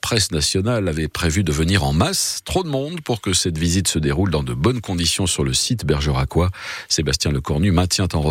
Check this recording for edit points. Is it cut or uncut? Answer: uncut